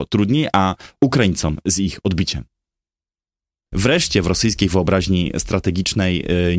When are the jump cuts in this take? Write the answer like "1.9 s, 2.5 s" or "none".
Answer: 1.0 s, 3.7 s